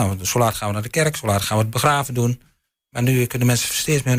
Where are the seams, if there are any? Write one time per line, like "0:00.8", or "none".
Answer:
none